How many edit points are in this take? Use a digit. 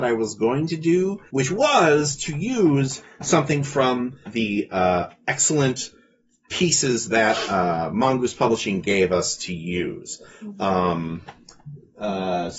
2